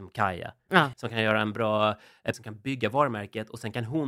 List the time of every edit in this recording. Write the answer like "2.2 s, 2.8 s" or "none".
0.9 s, 2.3 s